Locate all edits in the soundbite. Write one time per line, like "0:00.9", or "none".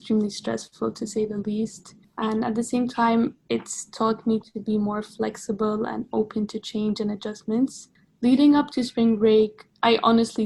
none